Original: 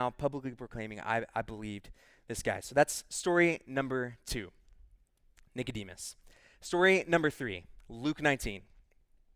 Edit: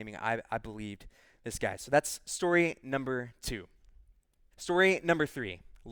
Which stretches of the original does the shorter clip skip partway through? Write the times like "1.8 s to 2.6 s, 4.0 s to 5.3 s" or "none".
5.3 s to 6.5 s